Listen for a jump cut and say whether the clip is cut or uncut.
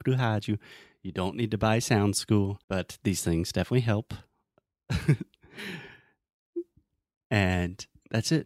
cut